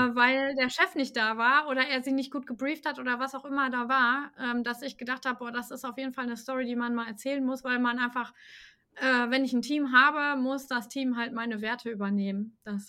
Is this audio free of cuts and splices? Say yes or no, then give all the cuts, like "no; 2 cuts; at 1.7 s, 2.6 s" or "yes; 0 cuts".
yes; 0 cuts